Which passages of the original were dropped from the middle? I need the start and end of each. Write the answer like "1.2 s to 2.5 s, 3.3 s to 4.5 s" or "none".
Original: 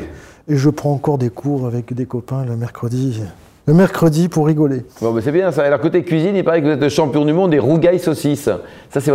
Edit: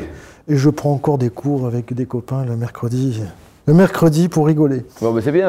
none